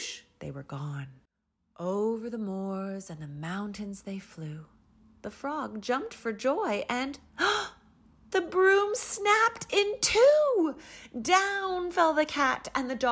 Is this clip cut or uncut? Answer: uncut